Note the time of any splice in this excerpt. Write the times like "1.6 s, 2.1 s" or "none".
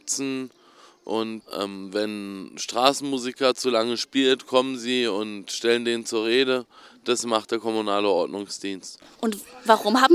none